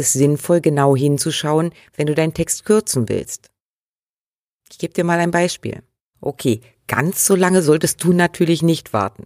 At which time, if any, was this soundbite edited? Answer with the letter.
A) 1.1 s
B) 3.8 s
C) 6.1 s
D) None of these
C